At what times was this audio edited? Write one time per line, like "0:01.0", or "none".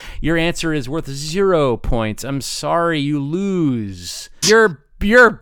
0:04.4